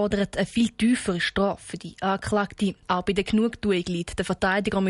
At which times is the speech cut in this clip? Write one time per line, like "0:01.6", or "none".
0:02.8